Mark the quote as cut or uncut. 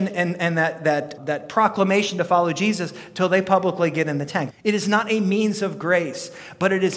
cut